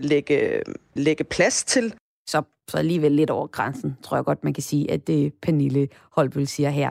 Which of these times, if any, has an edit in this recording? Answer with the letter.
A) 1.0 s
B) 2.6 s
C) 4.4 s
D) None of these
A